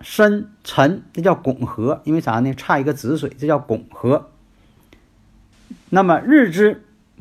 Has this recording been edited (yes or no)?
no